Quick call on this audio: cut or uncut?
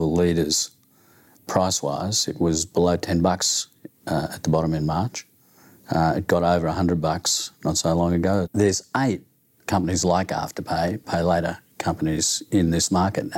cut